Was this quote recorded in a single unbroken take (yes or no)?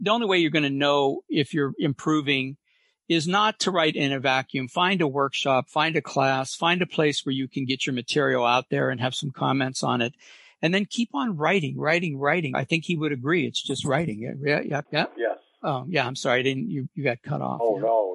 no